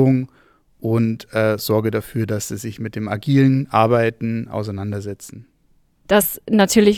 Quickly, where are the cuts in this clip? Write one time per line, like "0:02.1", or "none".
0:06.1